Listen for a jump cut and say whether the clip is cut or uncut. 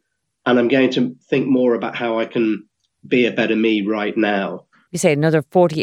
cut